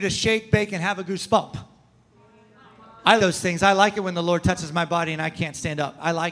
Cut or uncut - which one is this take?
cut